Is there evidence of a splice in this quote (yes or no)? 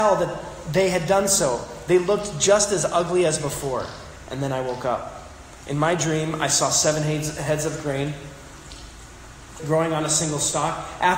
yes